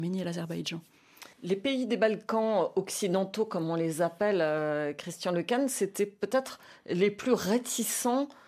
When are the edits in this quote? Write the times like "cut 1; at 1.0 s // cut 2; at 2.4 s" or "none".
cut 1; at 1.3 s